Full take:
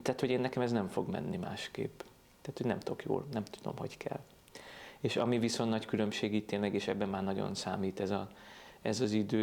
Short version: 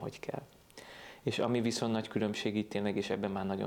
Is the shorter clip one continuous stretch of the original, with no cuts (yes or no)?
yes